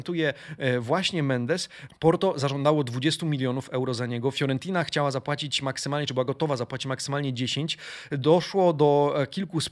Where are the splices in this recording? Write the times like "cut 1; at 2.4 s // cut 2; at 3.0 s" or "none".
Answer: cut 1; at 1.9 s